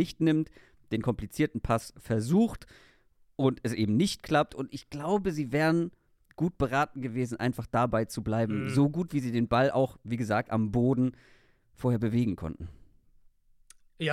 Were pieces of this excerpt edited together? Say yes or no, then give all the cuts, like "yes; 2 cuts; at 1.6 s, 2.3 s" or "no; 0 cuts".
no; 0 cuts